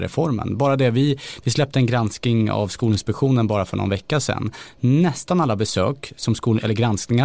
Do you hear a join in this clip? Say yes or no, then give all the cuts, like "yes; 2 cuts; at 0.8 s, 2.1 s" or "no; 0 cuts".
no; 0 cuts